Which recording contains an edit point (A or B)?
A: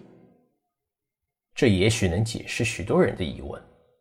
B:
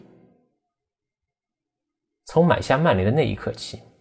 A